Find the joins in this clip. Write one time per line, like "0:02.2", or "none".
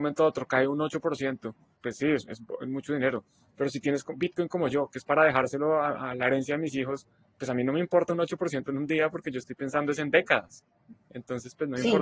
0:01.7